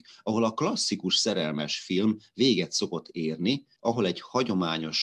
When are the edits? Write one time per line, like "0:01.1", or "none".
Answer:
0:03.8